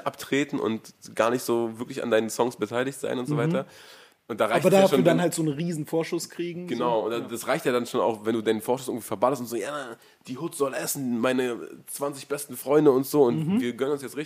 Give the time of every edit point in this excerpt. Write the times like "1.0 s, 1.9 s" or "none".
none

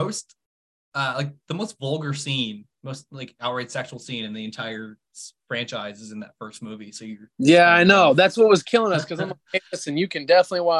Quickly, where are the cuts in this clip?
none

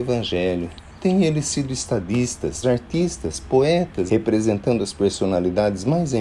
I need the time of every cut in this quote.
2.6 s, 4.1 s

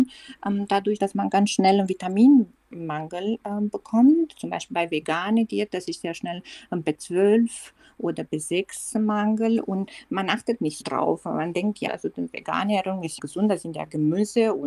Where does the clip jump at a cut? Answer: 1.0 s, 10.8 s, 11.9 s

